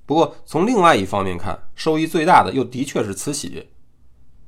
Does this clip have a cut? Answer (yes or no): yes